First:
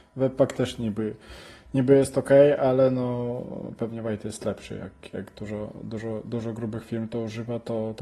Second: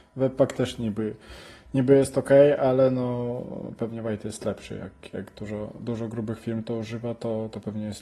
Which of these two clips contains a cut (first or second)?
second